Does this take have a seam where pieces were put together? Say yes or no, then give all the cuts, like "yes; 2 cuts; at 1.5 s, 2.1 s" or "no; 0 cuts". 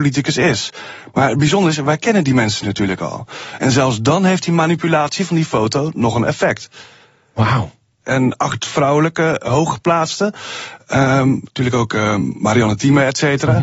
yes; 1 cut; at 8.0 s